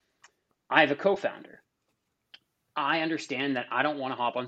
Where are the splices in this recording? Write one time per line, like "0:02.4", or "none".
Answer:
none